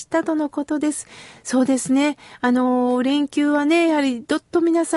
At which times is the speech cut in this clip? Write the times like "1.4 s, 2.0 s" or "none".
none